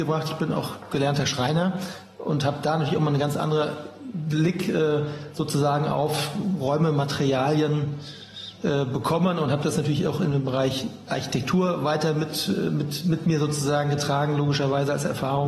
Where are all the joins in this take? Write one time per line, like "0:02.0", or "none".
none